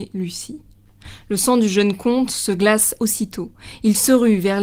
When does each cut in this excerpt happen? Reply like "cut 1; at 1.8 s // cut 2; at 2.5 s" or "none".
cut 1; at 3.0 s